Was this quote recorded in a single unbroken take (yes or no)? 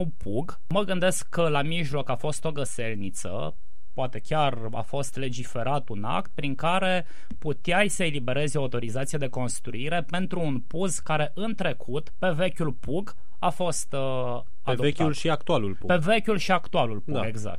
yes